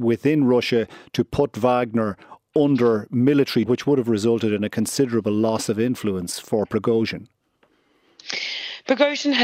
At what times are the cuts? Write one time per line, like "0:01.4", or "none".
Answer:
0:03.6